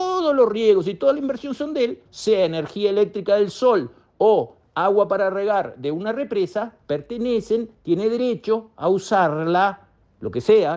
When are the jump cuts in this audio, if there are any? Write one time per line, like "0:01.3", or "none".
0:02.1